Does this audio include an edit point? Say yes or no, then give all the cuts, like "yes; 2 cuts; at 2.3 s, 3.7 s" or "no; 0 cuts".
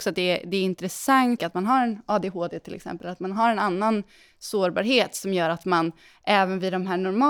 yes; 1 cut; at 1.4 s